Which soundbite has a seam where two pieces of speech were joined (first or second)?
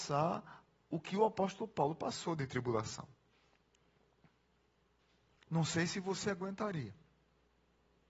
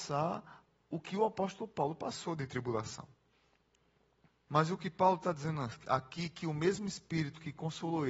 second